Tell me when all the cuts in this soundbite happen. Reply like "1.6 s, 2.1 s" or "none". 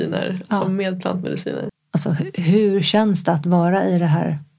1.7 s